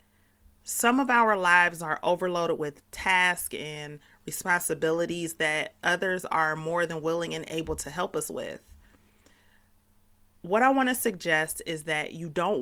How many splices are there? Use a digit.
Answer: 0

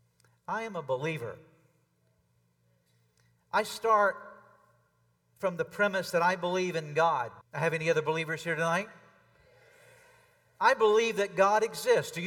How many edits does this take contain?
1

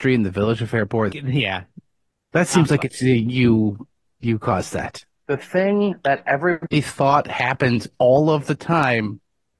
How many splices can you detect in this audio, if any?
2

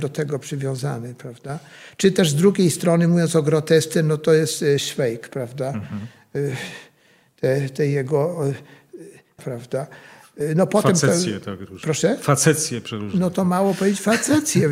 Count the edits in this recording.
1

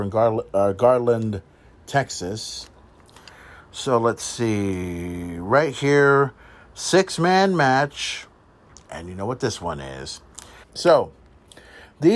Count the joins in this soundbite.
1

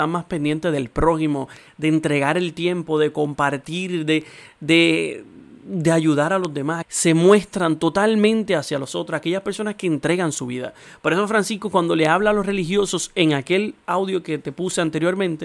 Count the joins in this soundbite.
1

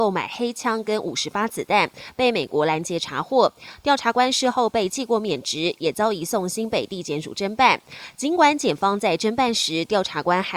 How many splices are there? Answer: 0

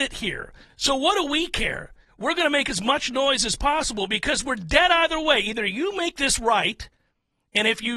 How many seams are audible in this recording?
0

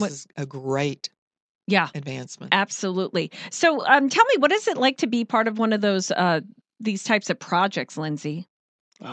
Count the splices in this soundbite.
0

